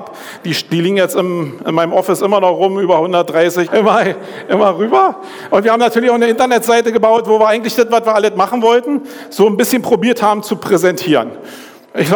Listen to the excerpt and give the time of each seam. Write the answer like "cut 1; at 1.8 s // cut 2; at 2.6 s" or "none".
cut 1; at 3.7 s

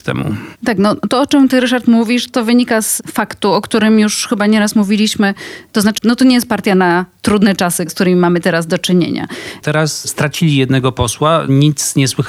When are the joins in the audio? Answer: cut 1; at 6.0 s // cut 2; at 9.6 s

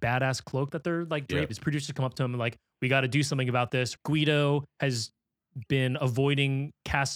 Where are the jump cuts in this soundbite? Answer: cut 1; at 1.5 s // cut 2; at 4.0 s

